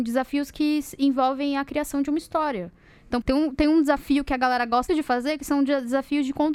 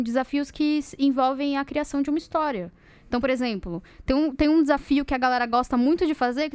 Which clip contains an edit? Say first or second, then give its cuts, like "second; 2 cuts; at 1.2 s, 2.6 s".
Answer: first; 2 cuts; at 3.2 s, 4.9 s